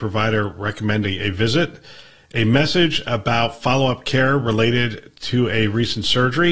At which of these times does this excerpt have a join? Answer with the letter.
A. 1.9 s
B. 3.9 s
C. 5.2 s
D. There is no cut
D